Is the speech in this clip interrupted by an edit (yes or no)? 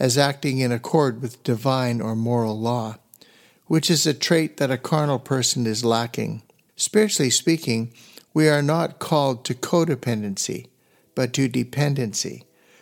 yes